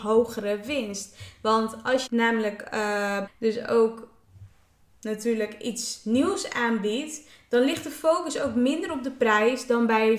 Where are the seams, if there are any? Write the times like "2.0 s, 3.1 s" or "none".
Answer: 2.1 s, 3.3 s